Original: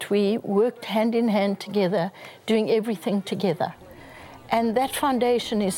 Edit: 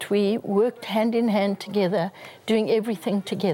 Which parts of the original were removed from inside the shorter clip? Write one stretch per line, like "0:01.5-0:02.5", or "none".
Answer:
none